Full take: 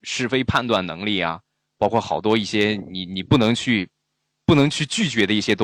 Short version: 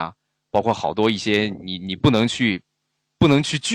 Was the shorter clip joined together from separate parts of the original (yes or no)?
no